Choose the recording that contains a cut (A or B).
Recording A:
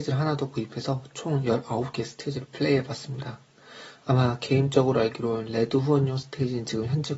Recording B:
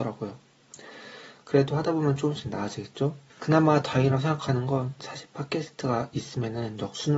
B